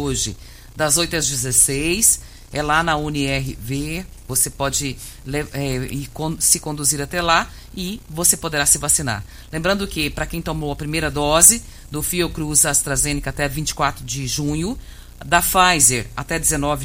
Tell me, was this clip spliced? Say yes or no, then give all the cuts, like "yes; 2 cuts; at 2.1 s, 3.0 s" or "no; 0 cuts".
no; 0 cuts